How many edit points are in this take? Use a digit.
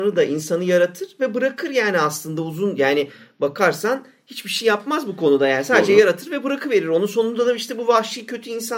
0